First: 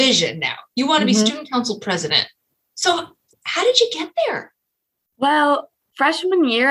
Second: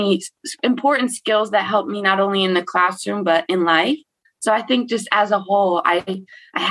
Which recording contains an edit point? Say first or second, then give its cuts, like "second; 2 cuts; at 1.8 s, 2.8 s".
second; 1 cut; at 4.2 s